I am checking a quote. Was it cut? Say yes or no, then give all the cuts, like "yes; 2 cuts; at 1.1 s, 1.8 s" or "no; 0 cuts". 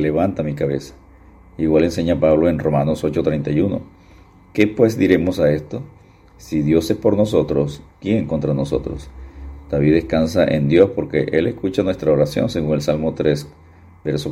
no; 0 cuts